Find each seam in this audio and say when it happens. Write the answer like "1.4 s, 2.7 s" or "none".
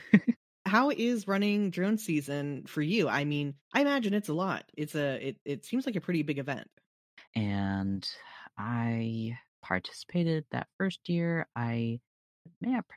3.6 s, 7.3 s